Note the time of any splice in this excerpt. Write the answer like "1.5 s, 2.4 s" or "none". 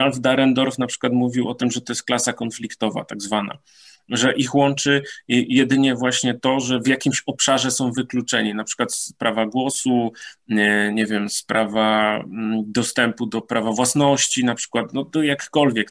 none